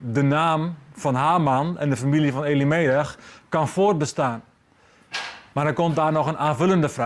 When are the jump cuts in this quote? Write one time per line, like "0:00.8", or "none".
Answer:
0:05.5